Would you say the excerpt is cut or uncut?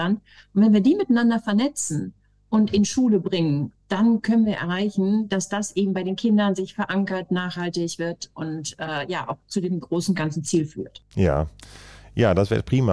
uncut